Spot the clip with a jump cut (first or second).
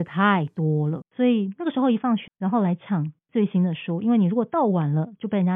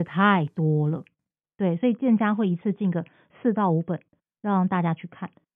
first